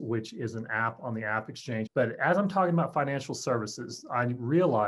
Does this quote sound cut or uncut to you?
cut